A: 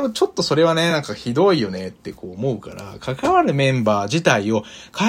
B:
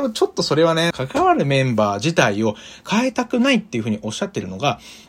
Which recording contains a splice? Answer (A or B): B